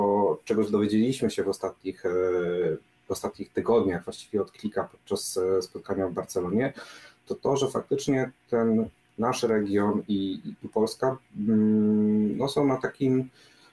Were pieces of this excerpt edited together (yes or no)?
no